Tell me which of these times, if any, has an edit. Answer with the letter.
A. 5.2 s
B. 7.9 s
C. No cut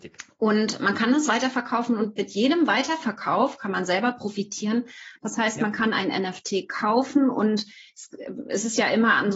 A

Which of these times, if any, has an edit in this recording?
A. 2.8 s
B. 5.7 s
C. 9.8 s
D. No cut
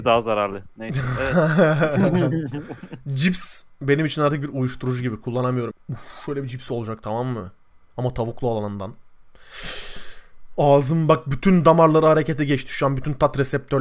B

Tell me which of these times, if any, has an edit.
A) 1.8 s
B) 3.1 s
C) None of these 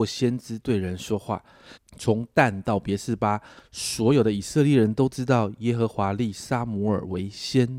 A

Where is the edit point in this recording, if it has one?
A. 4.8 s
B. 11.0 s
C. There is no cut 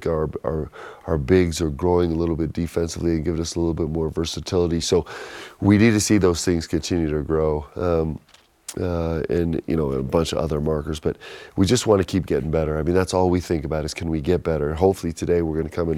C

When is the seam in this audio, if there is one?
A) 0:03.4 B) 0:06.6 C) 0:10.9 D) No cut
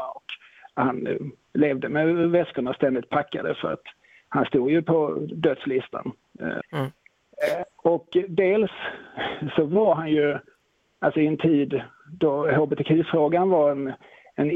B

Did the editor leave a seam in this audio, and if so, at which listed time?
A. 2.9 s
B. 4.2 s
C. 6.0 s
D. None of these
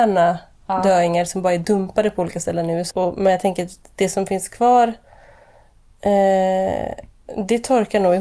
A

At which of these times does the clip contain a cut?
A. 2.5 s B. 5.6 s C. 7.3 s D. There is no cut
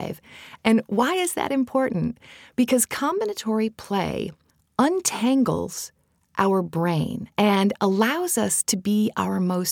C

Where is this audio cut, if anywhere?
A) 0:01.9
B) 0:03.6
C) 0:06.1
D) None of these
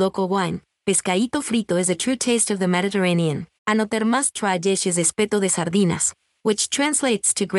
B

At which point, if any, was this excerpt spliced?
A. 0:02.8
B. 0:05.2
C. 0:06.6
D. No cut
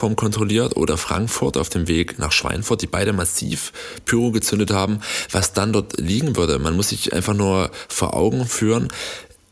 D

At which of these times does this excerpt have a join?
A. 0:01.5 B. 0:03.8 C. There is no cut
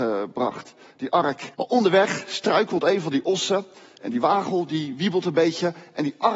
A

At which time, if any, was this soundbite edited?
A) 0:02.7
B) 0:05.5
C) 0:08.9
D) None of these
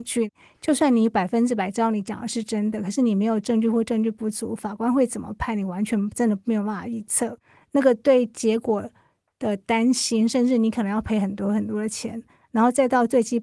D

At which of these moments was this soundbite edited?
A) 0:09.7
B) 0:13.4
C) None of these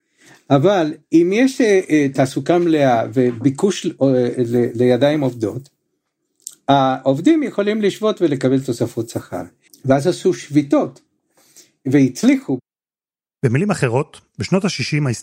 A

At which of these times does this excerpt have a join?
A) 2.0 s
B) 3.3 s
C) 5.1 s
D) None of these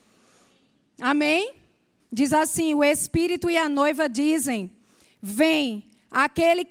A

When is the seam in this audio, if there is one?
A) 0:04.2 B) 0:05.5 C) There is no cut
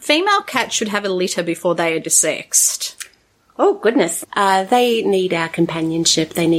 A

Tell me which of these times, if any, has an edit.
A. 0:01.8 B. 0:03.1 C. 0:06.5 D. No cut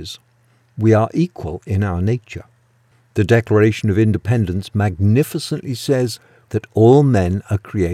C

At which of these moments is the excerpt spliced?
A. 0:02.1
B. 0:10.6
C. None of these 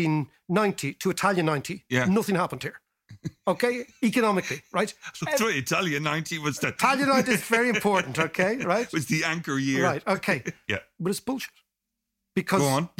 B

